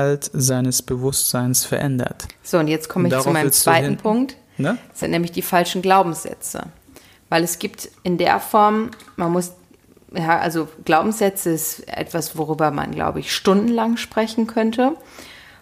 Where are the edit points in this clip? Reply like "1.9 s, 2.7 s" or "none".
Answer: none